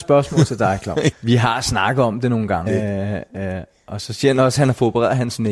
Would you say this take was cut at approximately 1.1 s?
yes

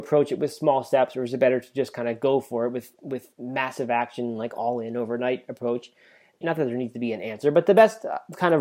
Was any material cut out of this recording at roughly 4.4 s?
no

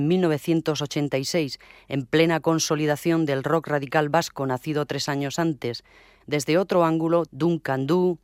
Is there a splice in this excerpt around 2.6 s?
no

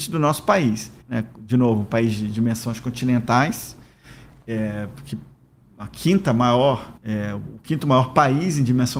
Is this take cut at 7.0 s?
yes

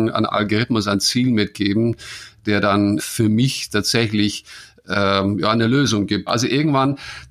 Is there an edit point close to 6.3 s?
yes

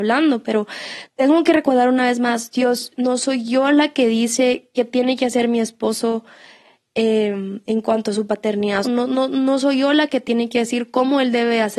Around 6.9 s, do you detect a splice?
no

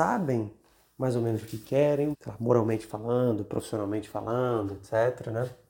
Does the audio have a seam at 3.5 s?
no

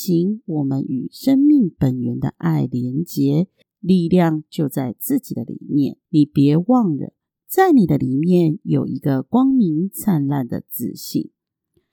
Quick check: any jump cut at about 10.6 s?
no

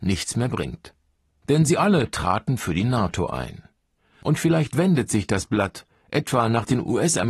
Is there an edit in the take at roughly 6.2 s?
no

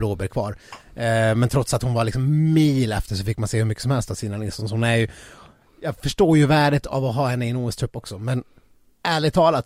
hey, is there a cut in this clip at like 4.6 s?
no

